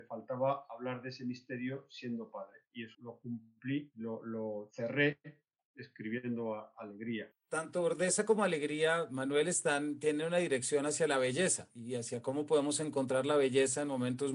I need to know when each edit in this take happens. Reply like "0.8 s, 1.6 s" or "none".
2.9 s